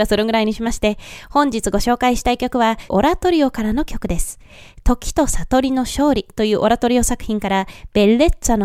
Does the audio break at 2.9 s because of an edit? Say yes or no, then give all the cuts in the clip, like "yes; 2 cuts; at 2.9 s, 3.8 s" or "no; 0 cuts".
yes; 1 cut; at 2.9 s